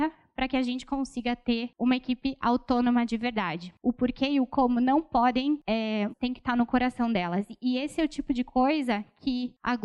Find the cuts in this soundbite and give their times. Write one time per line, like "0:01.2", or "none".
0:03.8
0:06.1